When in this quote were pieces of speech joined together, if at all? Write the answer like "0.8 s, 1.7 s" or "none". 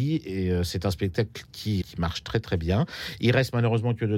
1.8 s